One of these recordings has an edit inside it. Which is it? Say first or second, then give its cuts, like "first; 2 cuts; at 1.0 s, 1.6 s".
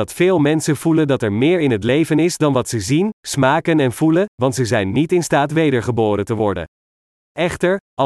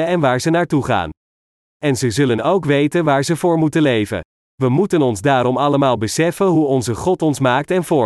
first; 1 cut; at 4.3 s